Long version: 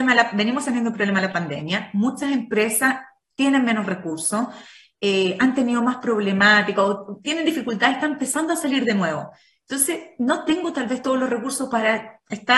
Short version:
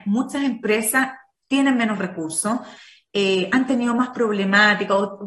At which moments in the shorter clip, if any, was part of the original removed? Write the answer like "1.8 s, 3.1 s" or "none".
none